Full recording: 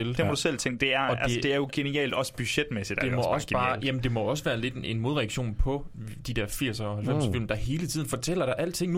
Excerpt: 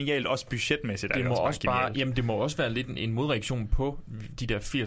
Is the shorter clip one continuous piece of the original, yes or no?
yes